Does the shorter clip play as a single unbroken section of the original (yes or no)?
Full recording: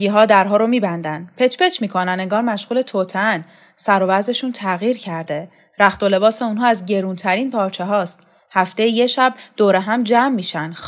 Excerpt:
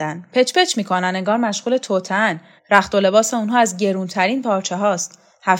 no